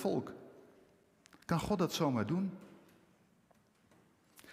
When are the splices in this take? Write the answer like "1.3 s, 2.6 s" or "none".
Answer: none